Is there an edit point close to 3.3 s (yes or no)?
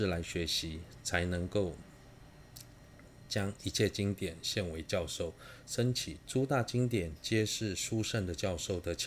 no